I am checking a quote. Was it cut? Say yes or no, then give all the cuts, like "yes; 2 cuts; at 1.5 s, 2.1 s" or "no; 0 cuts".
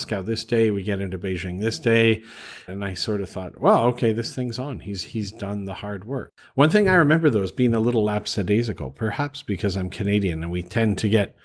yes; 1 cut; at 2.7 s